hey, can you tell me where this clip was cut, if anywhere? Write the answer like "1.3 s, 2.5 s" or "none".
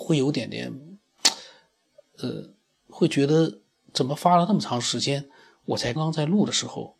6.0 s